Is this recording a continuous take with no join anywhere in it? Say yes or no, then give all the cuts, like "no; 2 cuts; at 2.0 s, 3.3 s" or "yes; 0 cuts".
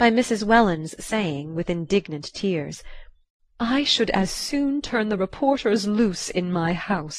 yes; 0 cuts